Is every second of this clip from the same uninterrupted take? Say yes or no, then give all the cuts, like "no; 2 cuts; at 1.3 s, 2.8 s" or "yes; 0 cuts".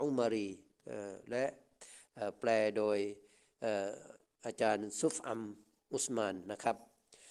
yes; 0 cuts